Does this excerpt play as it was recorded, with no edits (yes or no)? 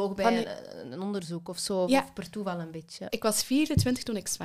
no